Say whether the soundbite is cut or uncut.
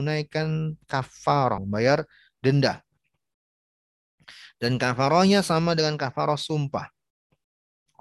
cut